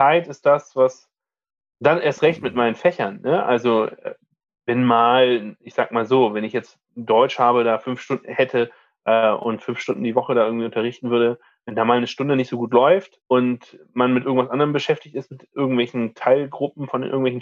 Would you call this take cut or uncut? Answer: cut